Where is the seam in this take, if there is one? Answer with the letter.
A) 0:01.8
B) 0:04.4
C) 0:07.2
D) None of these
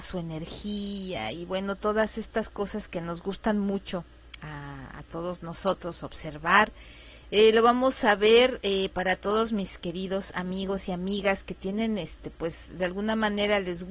C